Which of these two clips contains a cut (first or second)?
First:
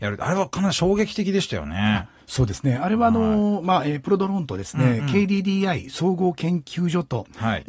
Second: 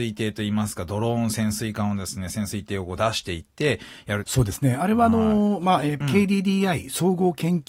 second